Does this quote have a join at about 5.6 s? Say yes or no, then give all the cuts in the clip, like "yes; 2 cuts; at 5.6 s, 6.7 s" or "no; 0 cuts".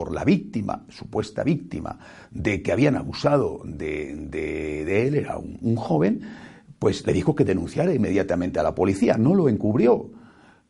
yes; 1 cut; at 5.6 s